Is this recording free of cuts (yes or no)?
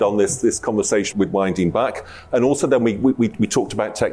no